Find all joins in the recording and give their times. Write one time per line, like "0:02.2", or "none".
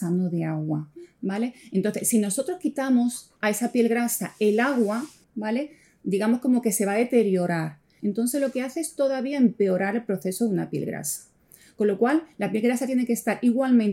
0:03.4
0:05.2
0:08.0